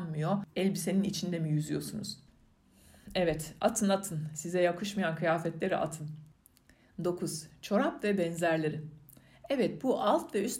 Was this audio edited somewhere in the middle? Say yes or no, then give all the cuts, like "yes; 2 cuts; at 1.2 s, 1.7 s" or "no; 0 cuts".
no; 0 cuts